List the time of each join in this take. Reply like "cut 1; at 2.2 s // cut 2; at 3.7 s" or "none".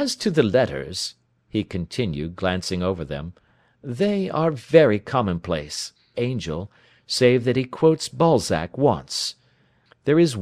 cut 1; at 6.1 s